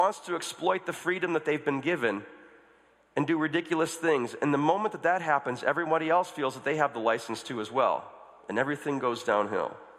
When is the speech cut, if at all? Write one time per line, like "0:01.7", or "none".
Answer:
none